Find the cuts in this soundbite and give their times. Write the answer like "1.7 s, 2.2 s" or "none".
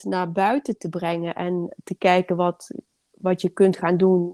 none